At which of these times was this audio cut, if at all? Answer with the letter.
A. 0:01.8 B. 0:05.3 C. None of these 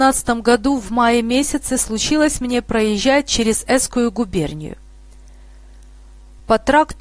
C